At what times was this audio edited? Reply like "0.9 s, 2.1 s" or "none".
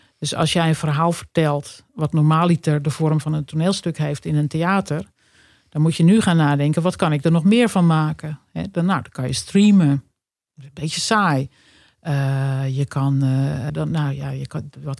13.7 s